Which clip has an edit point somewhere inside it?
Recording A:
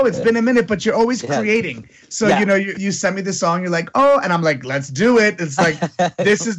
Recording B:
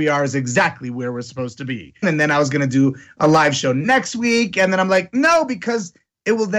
B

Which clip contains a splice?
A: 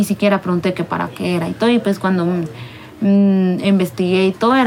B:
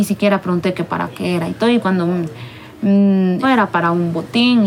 B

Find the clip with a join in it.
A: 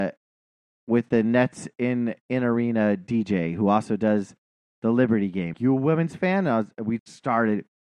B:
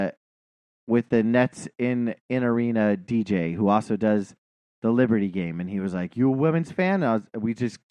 A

